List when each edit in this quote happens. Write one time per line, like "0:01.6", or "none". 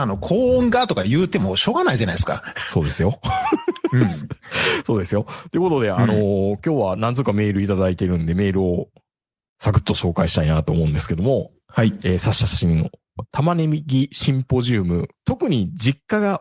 0:15.2